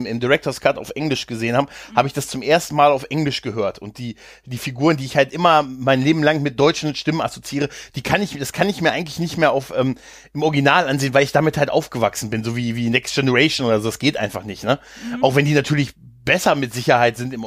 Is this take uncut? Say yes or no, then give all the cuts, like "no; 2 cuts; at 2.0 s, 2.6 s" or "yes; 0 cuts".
yes; 0 cuts